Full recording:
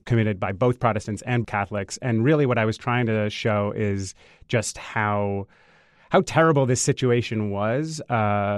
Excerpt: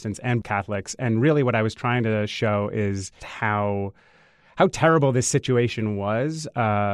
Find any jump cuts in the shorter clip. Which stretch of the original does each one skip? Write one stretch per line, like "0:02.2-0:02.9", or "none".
0:04.2-0:04.7